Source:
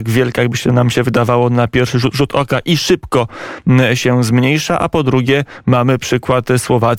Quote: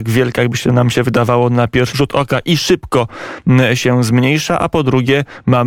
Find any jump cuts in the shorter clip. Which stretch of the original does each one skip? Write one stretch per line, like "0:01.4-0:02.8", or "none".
0:01.9-0:02.1